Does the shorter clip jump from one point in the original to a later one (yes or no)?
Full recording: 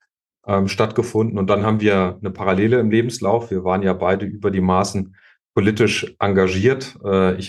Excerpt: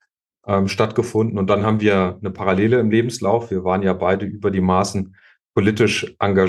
no